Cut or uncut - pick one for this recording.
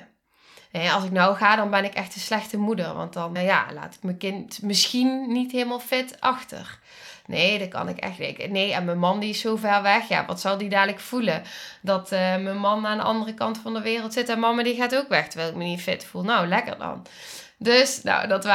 cut